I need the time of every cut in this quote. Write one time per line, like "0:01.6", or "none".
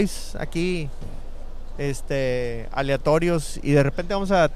none